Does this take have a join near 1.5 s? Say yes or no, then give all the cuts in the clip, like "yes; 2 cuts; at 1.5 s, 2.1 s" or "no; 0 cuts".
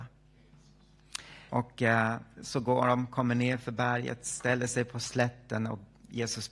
yes; 1 cut; at 1.5 s